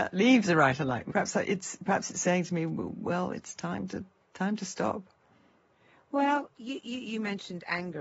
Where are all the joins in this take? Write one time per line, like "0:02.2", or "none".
0:01.1